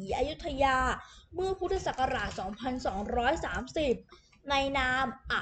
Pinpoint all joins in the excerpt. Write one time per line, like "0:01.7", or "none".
none